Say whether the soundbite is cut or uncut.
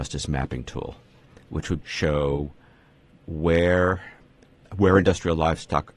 cut